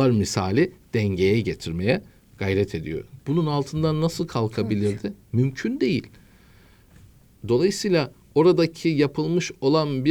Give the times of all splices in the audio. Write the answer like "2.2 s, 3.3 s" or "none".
3.2 s

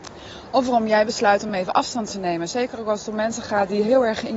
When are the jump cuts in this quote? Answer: none

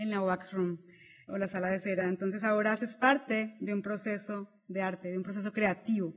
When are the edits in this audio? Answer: none

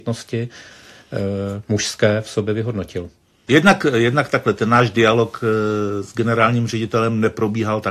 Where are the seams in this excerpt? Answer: 3.5 s

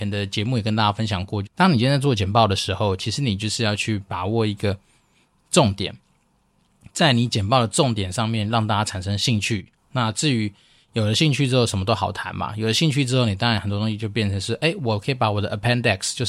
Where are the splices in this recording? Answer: 1.4 s

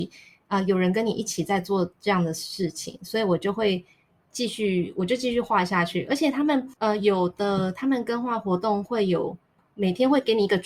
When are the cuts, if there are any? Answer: 6.8 s

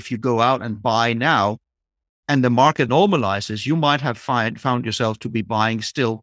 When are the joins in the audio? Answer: 2.9 s

